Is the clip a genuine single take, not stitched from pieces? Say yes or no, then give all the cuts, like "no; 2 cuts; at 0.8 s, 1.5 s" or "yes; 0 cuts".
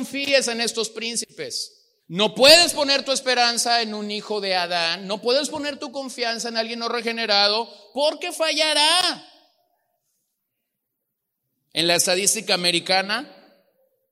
no; 1 cut; at 2.0 s